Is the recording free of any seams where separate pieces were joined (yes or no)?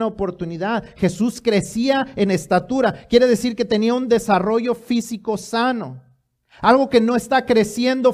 yes